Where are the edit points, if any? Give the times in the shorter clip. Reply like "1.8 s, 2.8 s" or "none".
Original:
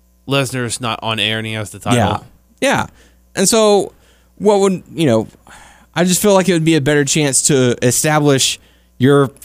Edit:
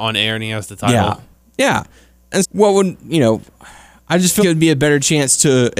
2.4 s, 4.4 s